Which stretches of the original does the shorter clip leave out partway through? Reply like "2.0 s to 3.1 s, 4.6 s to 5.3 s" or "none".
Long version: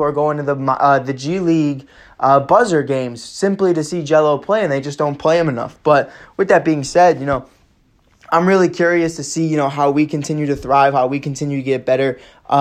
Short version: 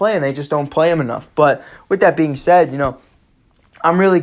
none